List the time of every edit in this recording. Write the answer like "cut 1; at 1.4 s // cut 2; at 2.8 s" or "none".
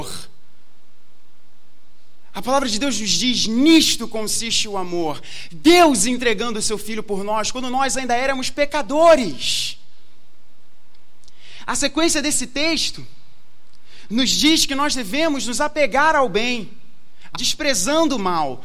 cut 1; at 17.3 s

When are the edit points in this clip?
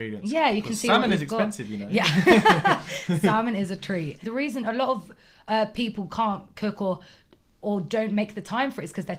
cut 1; at 4.2 s

